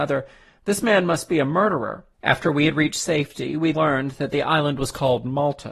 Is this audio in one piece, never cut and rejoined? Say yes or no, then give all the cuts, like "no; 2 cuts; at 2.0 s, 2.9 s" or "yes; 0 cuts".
no; 2 cuts; at 2.1 s, 3.7 s